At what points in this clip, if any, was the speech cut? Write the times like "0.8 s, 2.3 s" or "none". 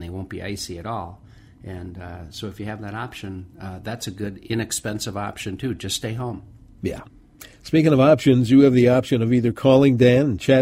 none